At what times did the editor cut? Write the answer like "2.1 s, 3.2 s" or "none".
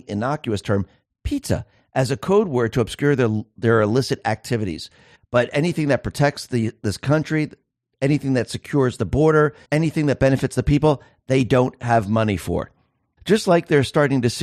5.1 s, 9.6 s, 13.2 s